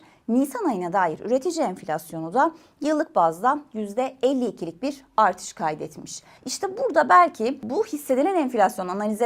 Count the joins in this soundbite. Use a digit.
1